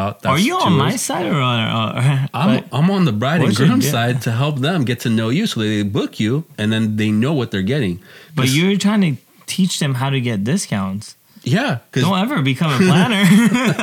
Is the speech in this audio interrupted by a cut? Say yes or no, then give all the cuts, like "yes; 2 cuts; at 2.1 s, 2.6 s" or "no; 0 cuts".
no; 0 cuts